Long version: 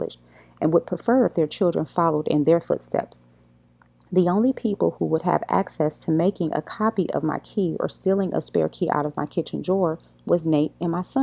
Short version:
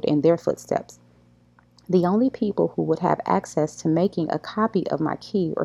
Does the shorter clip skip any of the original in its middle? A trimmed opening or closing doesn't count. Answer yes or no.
no